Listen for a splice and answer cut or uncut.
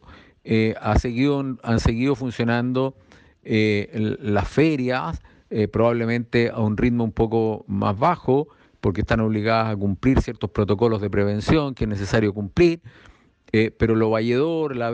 uncut